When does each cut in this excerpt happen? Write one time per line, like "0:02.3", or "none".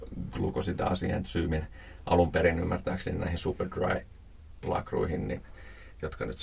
none